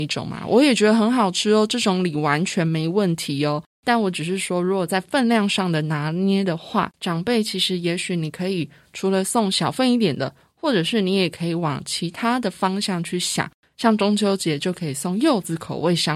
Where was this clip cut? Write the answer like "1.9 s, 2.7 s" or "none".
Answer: none